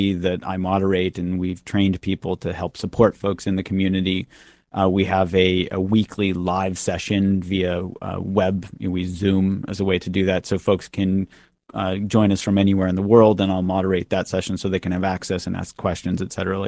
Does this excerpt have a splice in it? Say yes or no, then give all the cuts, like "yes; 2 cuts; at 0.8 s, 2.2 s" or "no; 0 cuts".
no; 0 cuts